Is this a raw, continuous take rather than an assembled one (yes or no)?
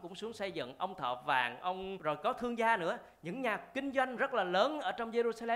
no